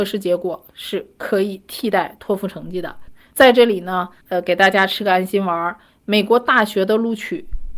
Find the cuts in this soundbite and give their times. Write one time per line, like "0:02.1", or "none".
0:03.3